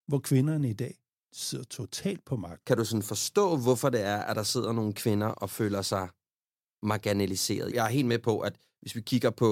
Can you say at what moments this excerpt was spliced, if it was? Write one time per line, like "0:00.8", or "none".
none